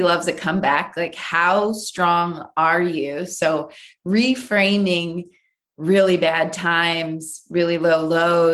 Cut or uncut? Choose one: uncut